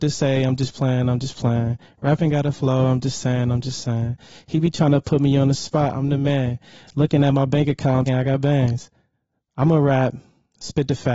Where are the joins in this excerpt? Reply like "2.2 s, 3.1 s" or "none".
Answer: 8.1 s